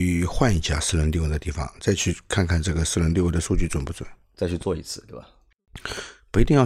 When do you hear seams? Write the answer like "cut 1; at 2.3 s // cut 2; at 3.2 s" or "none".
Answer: none